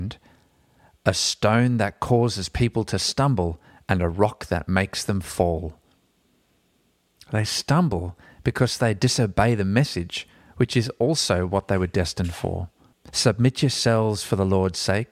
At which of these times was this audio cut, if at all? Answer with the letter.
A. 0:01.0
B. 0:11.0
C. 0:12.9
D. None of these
C